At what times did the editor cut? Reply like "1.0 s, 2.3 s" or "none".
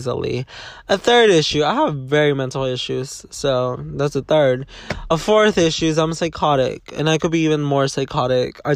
none